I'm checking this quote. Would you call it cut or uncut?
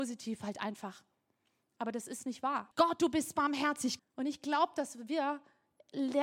cut